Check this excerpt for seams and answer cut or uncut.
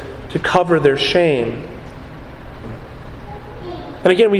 cut